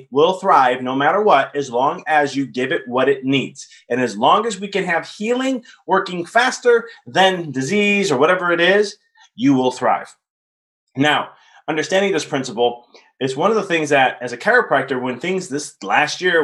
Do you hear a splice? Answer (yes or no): no